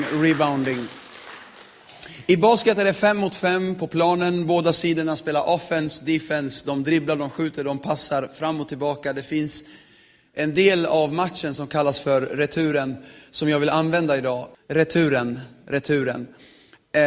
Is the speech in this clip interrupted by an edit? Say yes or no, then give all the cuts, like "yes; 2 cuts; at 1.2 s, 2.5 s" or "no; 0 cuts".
yes; 1 cut; at 14.5 s